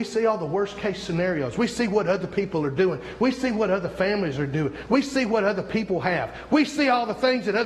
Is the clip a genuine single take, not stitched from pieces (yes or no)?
no